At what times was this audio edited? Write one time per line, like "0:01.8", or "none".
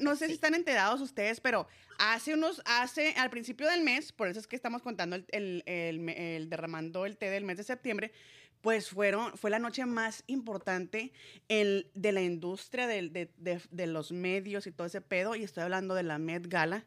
none